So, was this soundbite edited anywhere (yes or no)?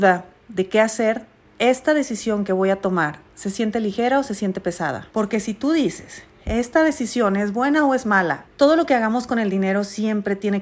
yes